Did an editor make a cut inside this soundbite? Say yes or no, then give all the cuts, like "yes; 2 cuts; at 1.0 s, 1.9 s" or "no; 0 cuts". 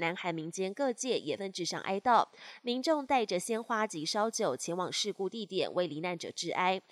yes; 1 cut; at 1.4 s